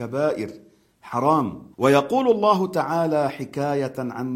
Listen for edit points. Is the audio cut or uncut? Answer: cut